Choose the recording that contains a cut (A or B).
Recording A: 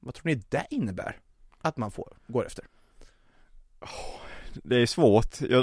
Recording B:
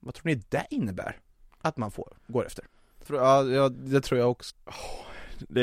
B